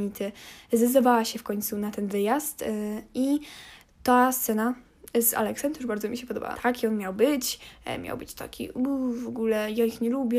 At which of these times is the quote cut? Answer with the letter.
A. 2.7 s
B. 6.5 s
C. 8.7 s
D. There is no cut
B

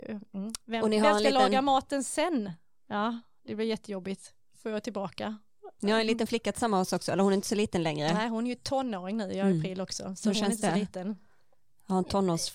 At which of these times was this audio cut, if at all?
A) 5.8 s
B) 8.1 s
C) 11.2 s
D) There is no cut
D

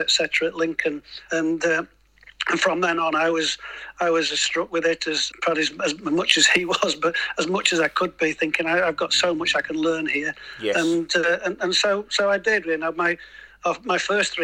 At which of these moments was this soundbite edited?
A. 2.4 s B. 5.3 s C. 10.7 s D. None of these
B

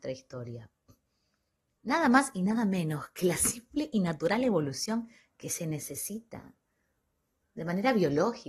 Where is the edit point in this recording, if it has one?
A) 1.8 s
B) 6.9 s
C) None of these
A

